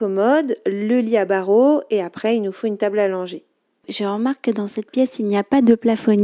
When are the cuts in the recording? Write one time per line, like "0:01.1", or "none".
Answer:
0:03.8